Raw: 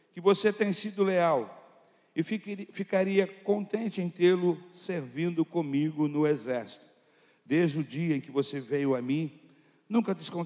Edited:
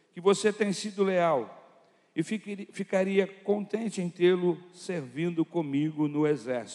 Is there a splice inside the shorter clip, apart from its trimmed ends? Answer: no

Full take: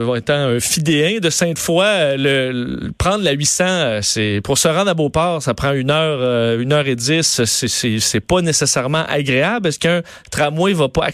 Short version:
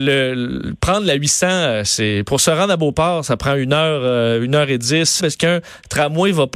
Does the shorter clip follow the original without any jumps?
no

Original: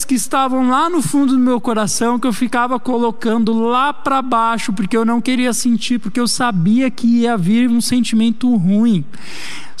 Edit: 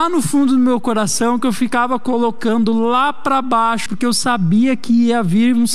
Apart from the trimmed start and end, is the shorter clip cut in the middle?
yes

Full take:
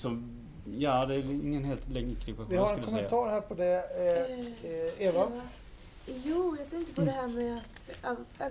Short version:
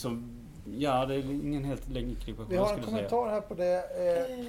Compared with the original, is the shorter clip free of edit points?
yes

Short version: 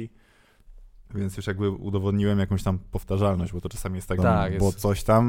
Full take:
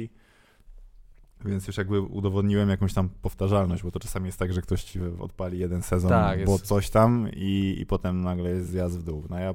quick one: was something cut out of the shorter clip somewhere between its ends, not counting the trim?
yes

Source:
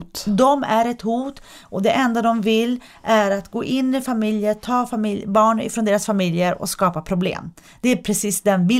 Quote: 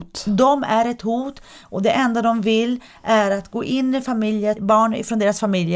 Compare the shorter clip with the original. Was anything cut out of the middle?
yes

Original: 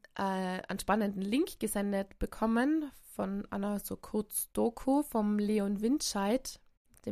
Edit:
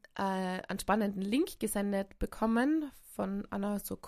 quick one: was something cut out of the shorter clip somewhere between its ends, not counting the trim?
no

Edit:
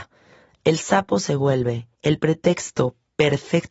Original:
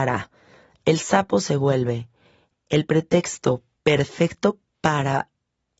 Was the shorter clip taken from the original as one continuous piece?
no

